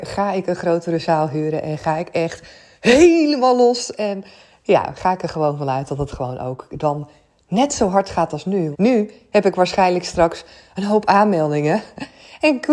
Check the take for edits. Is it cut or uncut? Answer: cut